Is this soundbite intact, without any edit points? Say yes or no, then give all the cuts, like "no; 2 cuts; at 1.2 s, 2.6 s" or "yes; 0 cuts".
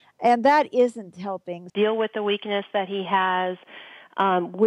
no; 1 cut; at 1.7 s